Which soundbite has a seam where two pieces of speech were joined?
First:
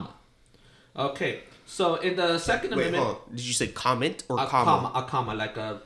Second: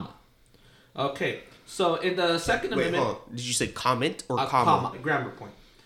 second; 1 cut; at 4.9 s

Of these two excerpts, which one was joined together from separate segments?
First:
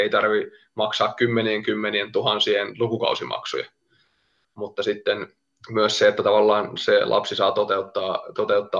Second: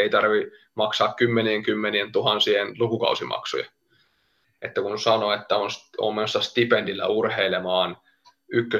second; 1 cut; at 4.4 s

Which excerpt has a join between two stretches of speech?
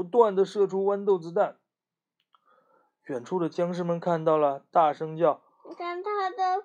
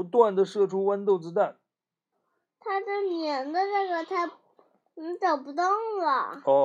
second; 1 cut; at 2.1 s

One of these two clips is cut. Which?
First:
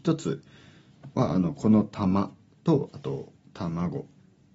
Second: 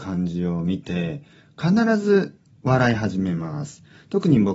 first; 1 cut; at 3.4 s

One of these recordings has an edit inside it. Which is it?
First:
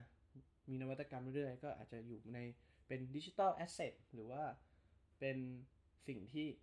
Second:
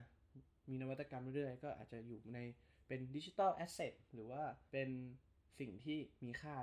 second; 1 cut; at 4.7 s

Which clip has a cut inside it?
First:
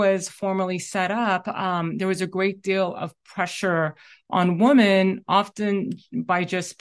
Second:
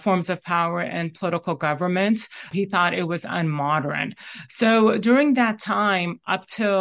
second; 1 cut; at 2.5 s

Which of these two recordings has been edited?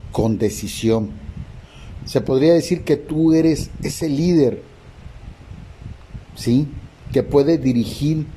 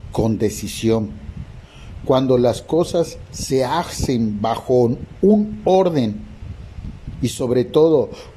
first; 1 cut; at 2.0 s

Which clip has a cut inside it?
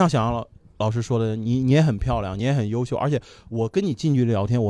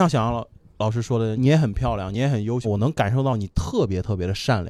second; 2 cuts; at 1.4 s, 2.6 s

